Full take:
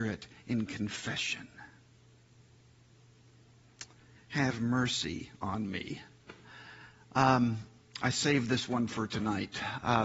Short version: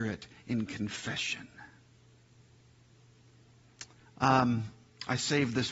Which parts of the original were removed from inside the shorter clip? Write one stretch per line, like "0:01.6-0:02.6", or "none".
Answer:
0:04.1-0:07.0

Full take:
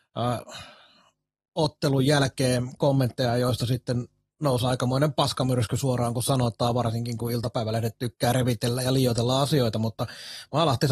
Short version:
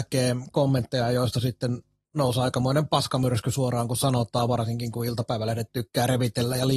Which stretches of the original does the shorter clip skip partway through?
none

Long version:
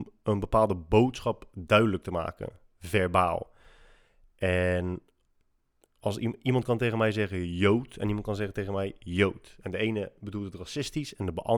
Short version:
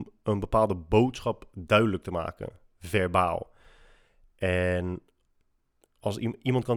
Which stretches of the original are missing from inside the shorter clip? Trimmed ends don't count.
none

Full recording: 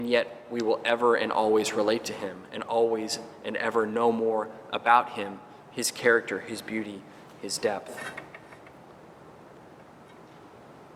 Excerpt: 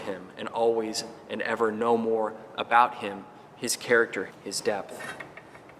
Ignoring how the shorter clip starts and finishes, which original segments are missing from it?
0:06.4-0:07.2

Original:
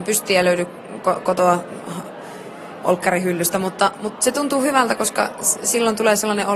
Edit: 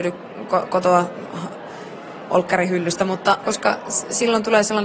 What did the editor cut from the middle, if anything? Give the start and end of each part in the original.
0:04.0-0:05.0

